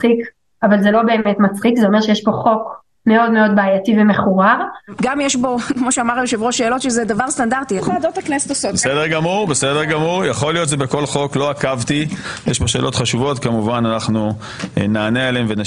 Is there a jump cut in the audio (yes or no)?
yes